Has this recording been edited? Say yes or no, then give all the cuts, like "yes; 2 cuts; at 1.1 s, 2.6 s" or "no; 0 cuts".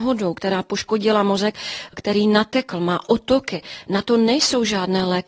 no; 0 cuts